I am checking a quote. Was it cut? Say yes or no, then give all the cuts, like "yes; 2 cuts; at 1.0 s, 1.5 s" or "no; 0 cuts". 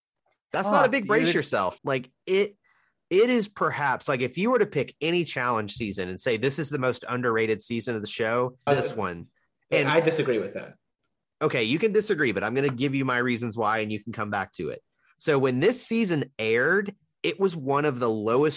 yes; 2 cuts; at 1.8 s, 8.7 s